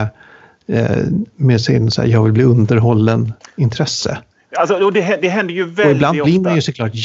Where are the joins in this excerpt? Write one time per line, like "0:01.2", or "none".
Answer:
none